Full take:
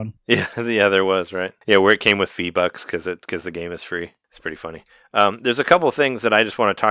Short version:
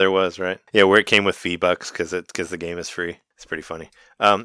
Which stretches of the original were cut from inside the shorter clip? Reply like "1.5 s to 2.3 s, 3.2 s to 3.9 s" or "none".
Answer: none

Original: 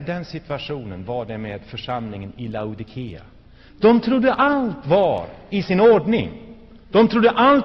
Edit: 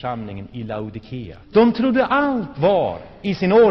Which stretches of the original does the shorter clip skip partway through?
3.3 s to 3.7 s

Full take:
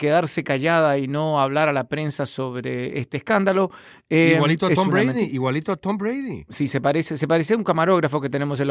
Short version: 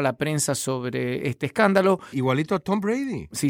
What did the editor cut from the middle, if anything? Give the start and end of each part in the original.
3.8 s to 5.3 s

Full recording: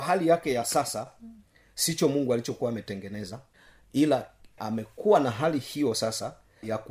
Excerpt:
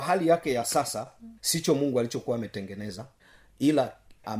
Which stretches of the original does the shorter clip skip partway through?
1.4 s to 1.7 s

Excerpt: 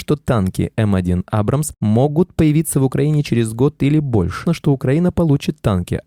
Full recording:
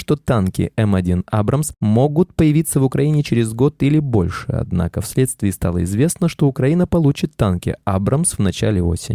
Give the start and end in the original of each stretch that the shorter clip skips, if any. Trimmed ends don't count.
4.5 s to 6.2 s

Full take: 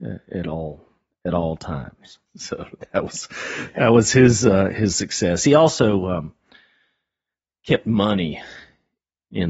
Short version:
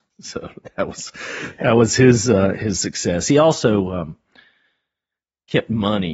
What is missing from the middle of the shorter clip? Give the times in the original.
none

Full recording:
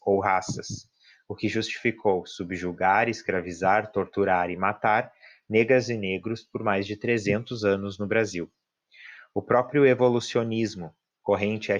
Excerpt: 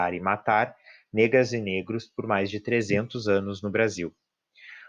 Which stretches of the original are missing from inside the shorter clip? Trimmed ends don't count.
none

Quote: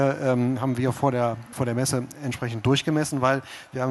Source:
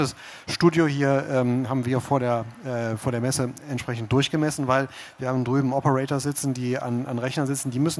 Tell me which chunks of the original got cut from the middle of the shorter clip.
2.6 s to 3.0 s

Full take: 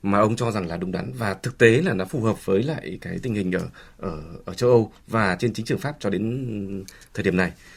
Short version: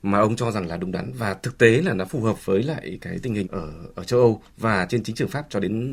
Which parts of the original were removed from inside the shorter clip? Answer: 3.4 s to 3.9 s

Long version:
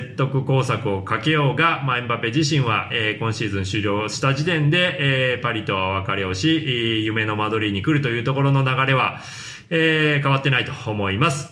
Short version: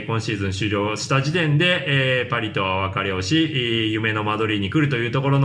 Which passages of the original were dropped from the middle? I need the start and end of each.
none

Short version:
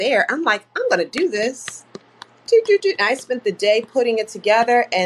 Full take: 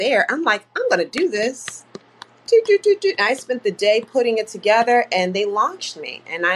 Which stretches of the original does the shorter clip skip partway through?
2.8 s to 3.0 s

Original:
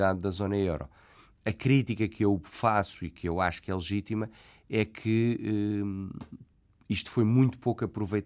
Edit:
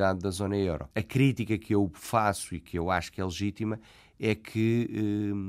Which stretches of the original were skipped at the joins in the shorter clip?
0.9 s to 1.4 s

